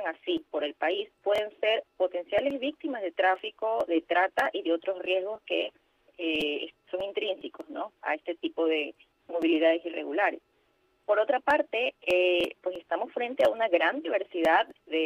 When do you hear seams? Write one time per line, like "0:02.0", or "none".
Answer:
none